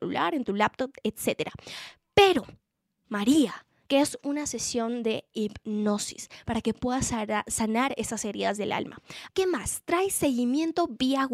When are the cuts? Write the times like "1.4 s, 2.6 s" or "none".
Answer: 3.8 s, 9.3 s